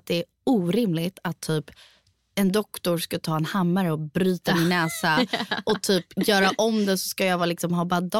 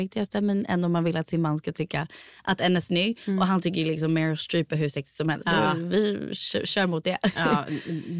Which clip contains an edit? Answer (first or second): second